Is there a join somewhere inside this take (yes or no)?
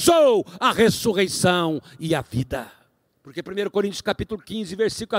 yes